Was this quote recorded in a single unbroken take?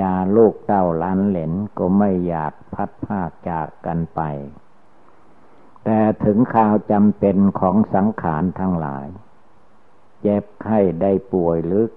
yes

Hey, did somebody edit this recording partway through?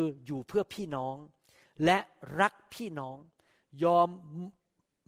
no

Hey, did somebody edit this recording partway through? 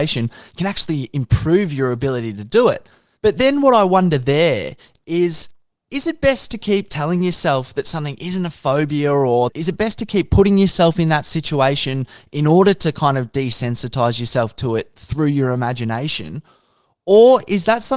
yes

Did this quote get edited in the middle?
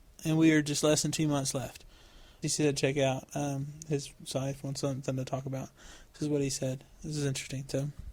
yes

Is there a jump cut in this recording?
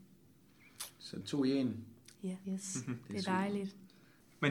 yes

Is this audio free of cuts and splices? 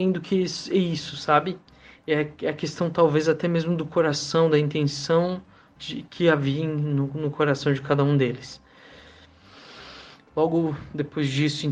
no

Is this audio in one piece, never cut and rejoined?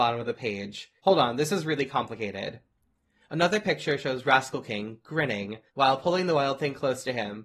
no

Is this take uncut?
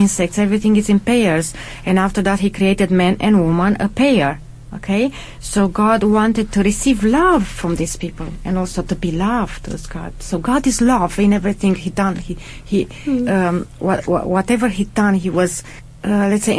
yes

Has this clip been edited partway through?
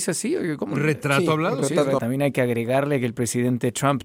yes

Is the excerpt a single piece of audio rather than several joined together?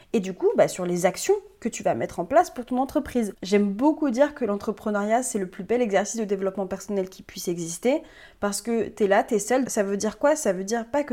no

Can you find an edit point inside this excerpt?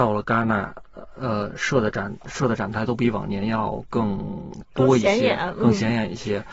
no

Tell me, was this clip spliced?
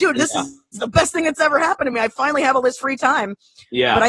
no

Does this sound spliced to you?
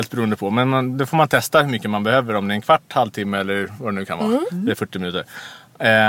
no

